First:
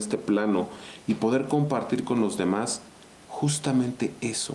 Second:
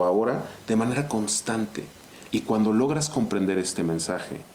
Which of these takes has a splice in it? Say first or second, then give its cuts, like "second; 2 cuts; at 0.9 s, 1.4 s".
second; 1 cut; at 2.3 s